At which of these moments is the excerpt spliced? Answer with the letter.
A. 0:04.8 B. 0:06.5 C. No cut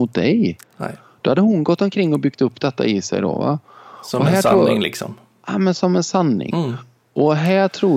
C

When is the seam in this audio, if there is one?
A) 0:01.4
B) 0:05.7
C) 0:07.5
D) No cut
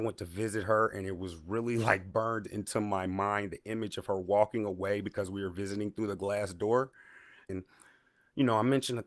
C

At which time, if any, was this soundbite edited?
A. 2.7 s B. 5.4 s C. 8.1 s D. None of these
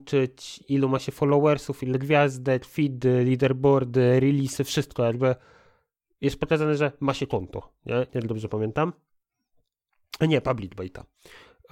C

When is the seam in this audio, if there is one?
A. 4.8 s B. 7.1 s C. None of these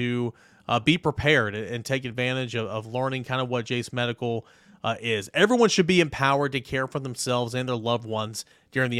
C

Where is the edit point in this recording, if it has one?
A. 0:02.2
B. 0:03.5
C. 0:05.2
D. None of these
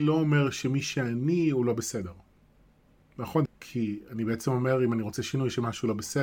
B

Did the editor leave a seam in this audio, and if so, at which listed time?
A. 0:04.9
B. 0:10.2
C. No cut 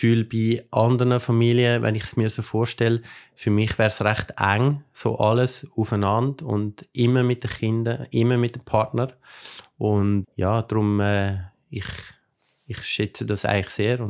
B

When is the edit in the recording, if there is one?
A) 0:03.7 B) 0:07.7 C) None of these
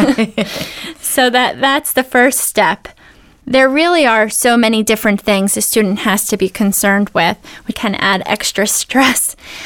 B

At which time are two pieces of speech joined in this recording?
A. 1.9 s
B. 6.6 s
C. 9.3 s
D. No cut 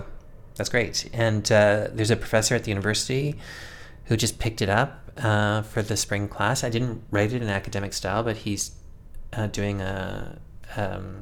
D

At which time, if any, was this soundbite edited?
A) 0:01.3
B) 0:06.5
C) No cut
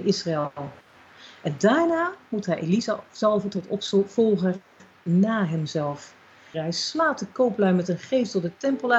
B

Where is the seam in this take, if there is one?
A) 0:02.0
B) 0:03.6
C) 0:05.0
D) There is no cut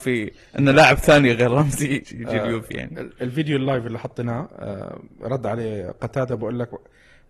A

